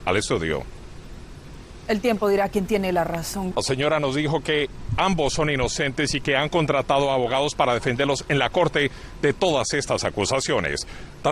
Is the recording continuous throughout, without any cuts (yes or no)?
no